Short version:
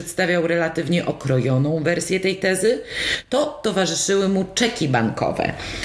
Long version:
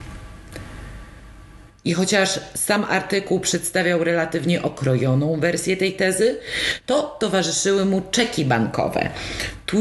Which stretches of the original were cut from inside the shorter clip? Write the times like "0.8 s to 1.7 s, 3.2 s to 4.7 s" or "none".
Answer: none